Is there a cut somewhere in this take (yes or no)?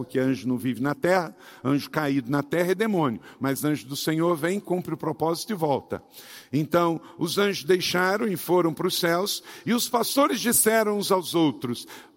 no